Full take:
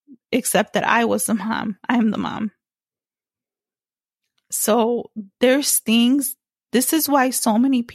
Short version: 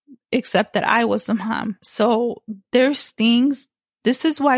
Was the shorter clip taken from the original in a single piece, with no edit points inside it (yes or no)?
no